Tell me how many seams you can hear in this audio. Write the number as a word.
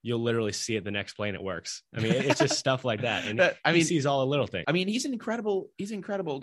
one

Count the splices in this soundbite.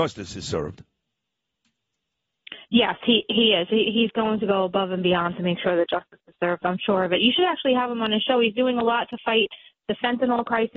zero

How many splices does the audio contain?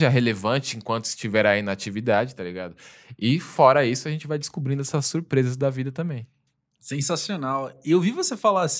zero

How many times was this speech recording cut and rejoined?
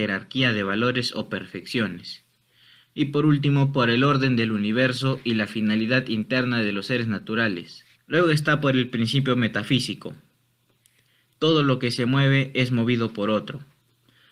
two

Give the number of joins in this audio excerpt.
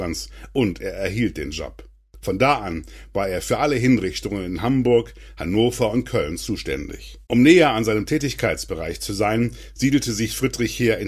one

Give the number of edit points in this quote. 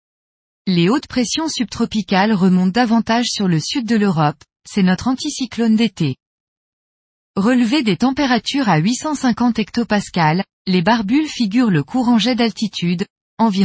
one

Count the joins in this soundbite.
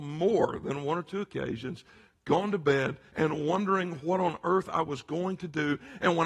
one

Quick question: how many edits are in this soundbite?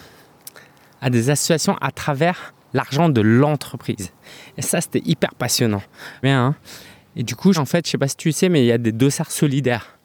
two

